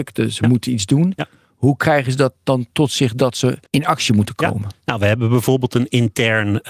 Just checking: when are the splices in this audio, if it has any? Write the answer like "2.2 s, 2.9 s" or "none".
3.7 s